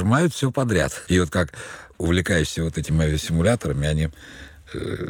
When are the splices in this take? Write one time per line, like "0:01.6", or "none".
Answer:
0:01.1